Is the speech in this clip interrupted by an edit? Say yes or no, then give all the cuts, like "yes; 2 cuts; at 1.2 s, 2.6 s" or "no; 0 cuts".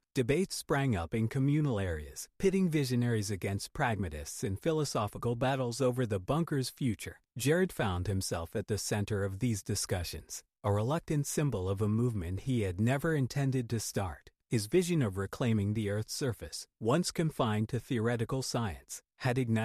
no; 0 cuts